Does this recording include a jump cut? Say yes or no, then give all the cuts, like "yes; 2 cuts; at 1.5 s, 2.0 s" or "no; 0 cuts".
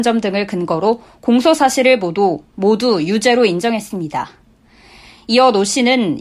no; 0 cuts